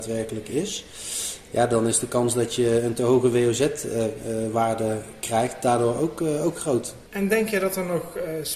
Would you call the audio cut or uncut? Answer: cut